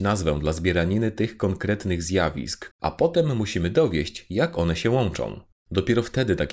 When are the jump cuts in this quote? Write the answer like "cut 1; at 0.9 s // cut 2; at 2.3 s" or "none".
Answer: cut 1; at 2.7 s